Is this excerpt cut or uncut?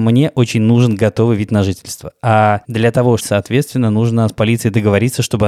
cut